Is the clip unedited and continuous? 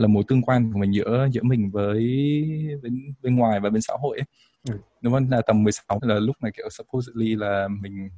no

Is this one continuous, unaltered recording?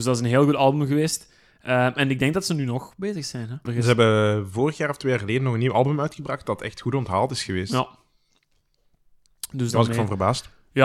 no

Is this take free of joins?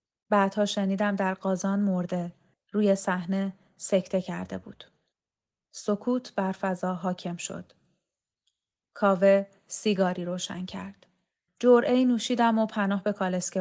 no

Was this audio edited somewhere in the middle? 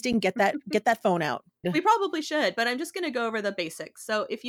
yes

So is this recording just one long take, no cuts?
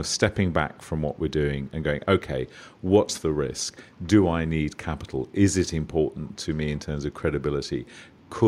yes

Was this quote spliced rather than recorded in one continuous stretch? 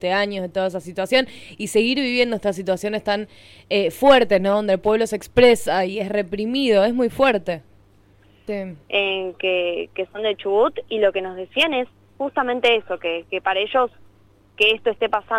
yes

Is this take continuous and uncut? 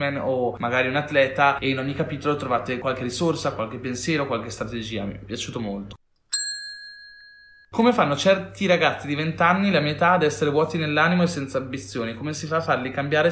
yes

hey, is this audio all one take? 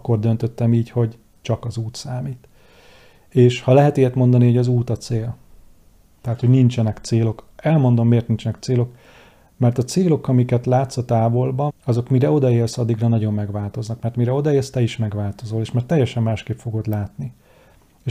no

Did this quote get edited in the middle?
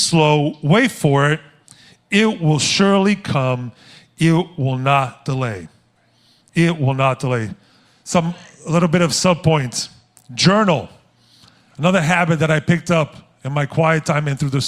no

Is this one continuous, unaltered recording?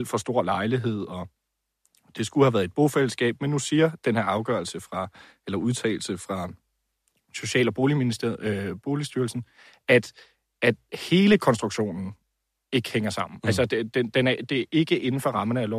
yes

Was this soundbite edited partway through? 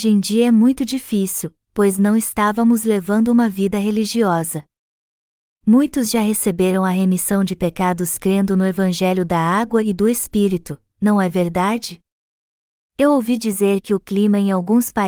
no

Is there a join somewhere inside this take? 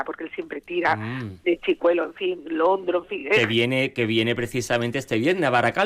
no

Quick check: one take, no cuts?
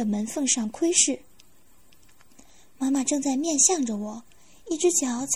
yes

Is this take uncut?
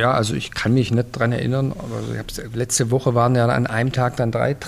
yes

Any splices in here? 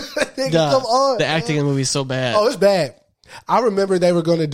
no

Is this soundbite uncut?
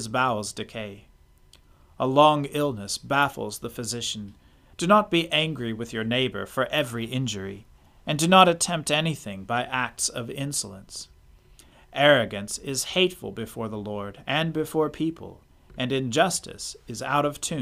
no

